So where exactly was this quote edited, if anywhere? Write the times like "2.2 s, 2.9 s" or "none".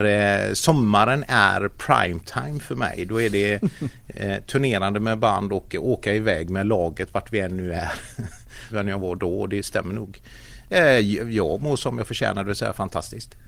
8.7 s, 10.7 s